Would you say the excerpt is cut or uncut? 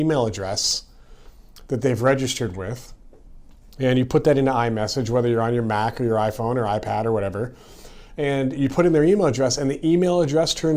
uncut